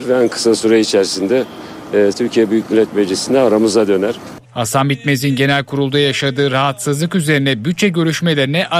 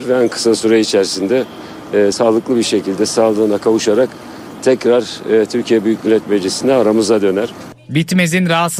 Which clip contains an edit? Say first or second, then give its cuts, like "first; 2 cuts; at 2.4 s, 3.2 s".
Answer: first; 2 cuts; at 2.1 s, 4.4 s